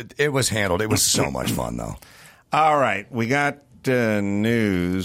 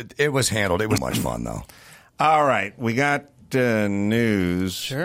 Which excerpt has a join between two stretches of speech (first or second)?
second